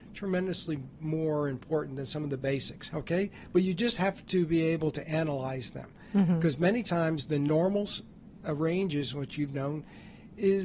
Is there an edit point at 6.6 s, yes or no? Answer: no